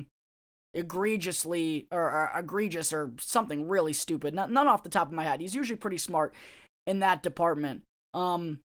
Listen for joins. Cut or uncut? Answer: uncut